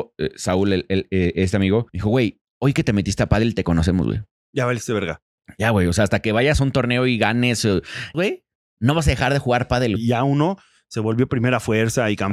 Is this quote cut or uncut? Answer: cut